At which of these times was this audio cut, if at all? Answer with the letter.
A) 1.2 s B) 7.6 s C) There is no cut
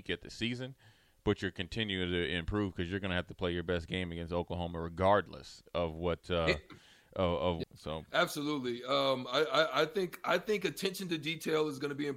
B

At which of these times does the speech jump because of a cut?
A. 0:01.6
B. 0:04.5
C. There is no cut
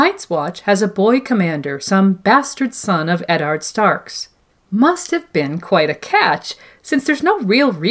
B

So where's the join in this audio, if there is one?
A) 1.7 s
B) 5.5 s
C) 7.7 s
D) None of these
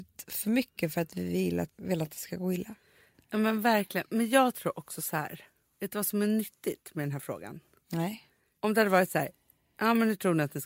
A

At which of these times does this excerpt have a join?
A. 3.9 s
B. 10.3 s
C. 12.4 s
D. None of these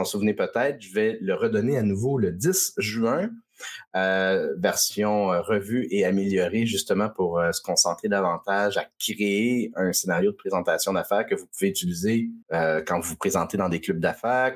C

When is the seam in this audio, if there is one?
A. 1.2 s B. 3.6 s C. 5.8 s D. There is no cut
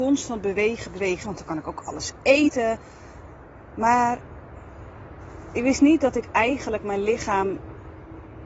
A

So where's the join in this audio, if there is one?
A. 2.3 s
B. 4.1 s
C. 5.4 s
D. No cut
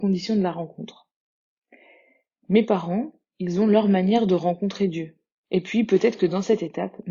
C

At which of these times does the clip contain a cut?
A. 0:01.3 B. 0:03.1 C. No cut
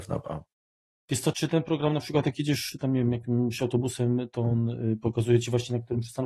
A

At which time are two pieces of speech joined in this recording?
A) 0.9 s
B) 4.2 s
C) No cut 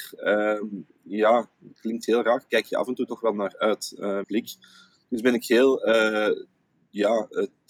B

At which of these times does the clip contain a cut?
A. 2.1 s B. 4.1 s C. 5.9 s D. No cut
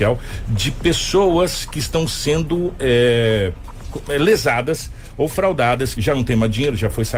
C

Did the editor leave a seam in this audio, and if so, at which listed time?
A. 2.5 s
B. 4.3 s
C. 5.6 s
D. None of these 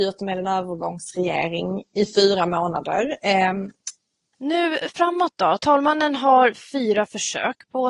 B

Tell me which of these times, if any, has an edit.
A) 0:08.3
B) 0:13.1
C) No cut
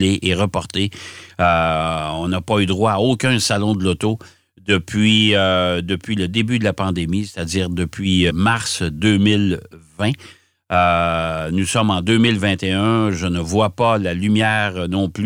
A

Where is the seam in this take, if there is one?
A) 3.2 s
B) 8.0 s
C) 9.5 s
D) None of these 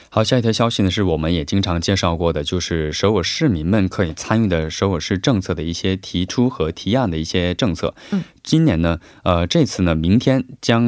A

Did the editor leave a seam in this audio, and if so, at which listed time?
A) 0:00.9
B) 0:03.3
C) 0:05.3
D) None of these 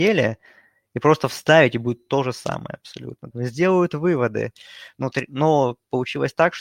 B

